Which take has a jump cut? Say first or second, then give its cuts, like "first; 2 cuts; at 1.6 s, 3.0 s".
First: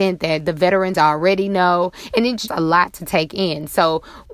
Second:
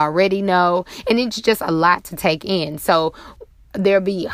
first; 1 cut; at 2.5 s